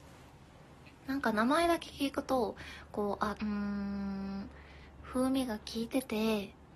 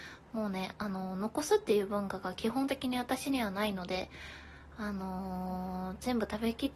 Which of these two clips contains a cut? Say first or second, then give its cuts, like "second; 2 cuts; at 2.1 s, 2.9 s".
first; 1 cut; at 3.4 s